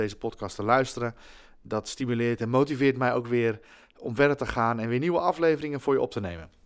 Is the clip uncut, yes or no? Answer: yes